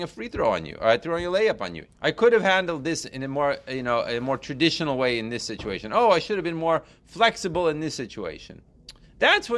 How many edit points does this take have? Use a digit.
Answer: 1